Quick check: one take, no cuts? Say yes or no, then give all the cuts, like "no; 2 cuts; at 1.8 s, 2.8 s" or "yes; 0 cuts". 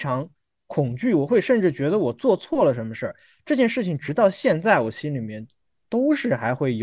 yes; 0 cuts